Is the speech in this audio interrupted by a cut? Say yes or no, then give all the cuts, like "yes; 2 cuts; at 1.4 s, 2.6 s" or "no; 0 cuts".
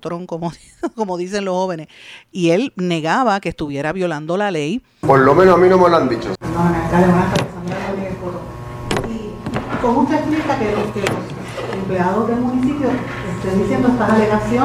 yes; 3 cuts; at 2.3 s, 5.0 s, 6.4 s